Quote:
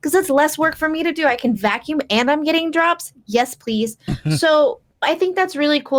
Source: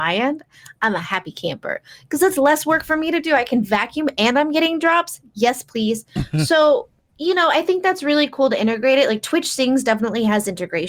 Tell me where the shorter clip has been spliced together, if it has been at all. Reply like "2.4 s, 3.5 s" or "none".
5.0 s

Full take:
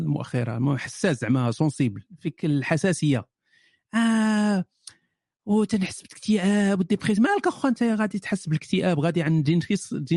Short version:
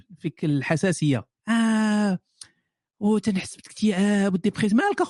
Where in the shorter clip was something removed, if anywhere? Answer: 1.4 s

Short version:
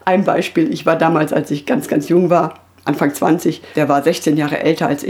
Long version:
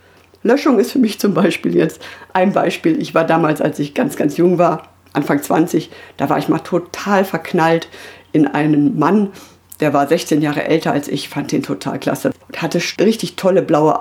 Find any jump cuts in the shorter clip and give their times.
3.7 s

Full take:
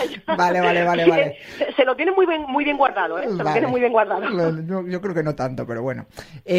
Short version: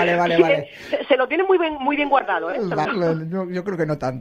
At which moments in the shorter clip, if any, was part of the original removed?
2.9 s

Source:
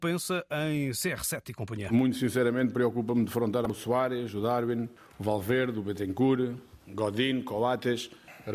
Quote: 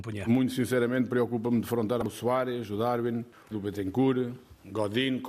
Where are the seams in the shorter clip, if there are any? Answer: 3.5 s

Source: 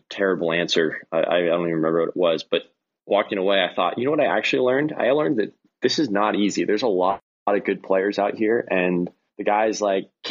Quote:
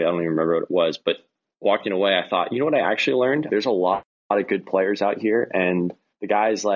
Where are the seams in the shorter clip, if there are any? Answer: 3.5 s

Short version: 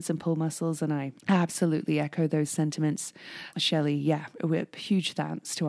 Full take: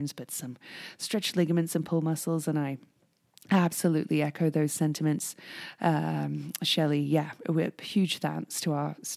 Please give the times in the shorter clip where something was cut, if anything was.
1.2 s, 3.5 s

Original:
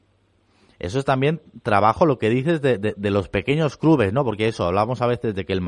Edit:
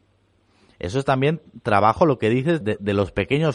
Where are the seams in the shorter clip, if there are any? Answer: 2.6 s

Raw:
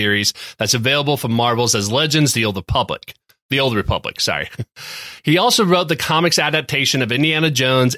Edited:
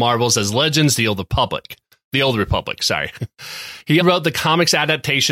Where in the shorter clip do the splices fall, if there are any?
4.0 s

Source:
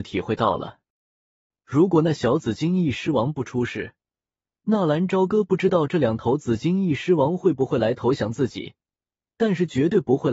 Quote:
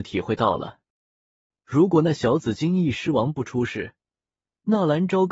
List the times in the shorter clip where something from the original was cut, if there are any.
none

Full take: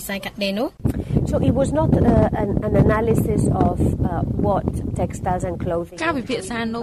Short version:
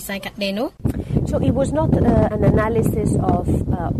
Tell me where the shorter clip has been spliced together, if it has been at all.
2.3 s

